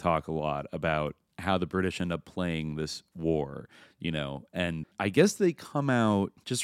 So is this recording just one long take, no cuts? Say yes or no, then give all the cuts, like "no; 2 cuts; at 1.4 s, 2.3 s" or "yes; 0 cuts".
no; 1 cut; at 4.8 s